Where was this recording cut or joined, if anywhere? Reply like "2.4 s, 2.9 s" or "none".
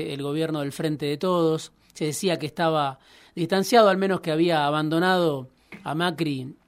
none